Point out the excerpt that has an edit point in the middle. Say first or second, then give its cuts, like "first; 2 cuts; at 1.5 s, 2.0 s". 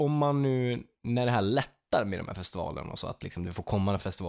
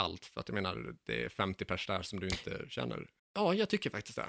second; 1 cut; at 3.2 s